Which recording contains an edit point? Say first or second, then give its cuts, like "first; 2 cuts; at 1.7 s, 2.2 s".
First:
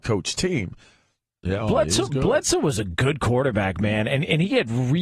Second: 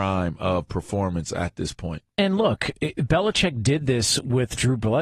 first; 1 cut; at 1.4 s